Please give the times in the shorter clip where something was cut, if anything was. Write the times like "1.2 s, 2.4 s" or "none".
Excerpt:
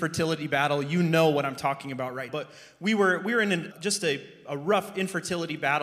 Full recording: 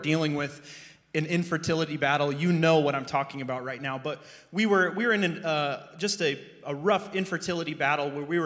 2.3 s, 3.7 s